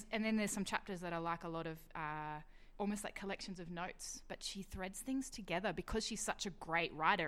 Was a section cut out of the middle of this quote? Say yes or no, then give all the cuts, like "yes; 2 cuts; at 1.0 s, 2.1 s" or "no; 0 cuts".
yes; 1 cut; at 2.8 s